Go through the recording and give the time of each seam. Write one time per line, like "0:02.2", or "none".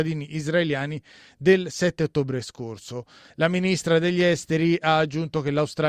0:03.3